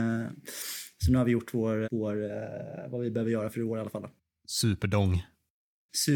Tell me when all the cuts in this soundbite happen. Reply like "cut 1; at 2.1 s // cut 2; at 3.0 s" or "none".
cut 1; at 1.8 s